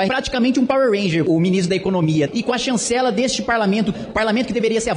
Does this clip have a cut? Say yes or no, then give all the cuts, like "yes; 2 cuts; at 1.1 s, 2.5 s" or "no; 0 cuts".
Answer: yes; 2 cuts; at 2.3 s, 3.9 s